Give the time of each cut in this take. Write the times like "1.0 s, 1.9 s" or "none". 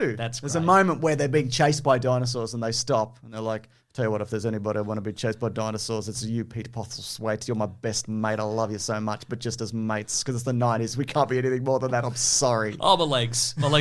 none